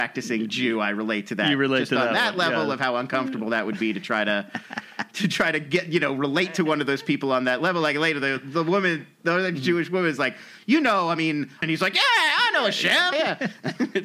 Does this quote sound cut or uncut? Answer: cut